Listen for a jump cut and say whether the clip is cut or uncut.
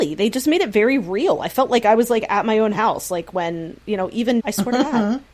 cut